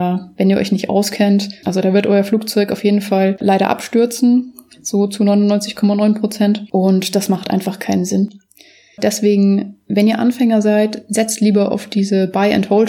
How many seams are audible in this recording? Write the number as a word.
one